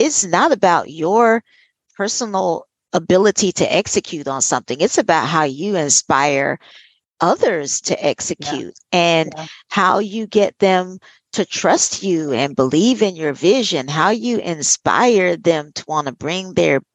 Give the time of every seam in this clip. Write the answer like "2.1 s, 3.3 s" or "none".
none